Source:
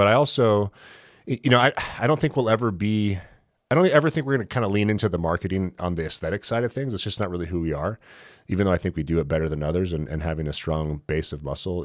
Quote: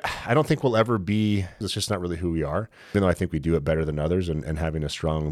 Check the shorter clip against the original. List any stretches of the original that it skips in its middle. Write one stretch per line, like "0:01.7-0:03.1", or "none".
0:03.3-0:06.9
0:08.2-0:08.6